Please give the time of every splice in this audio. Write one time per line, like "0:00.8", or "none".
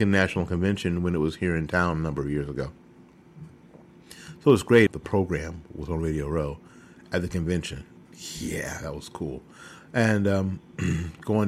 0:04.9